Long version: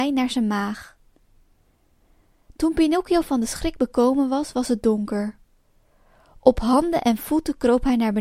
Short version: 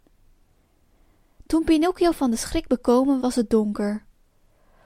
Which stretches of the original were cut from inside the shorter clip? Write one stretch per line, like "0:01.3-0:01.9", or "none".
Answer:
0:04.3-0:04.5